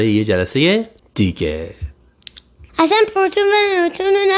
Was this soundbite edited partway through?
yes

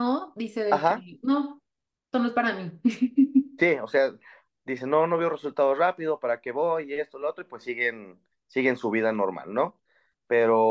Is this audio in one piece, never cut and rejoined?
yes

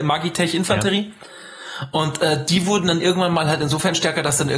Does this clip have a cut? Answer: no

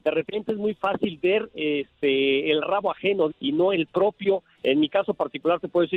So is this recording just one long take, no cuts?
no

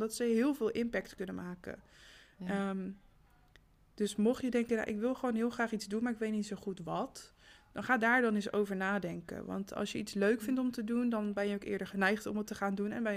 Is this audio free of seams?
yes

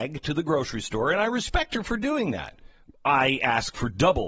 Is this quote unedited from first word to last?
yes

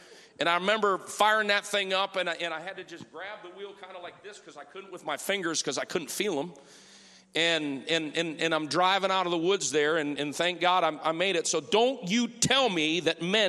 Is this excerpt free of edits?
yes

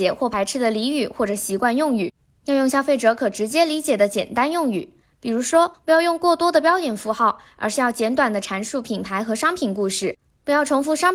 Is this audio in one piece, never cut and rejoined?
no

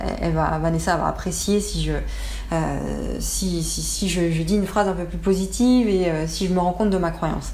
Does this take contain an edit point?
no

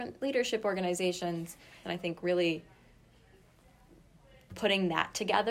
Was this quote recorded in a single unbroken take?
no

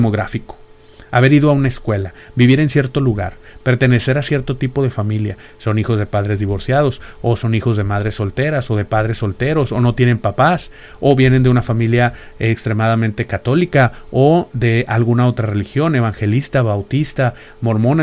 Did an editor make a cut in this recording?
no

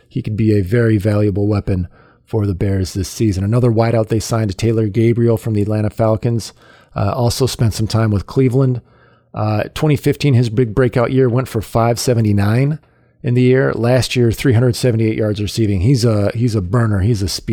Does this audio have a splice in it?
no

